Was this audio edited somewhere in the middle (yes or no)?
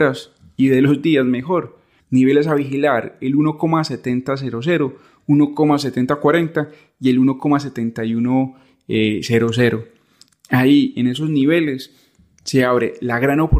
yes